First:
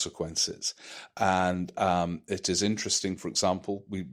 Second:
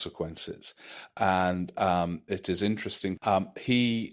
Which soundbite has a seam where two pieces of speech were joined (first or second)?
second